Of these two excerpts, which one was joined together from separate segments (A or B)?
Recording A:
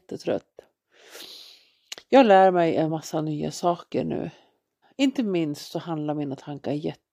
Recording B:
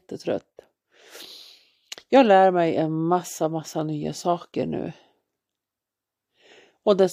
A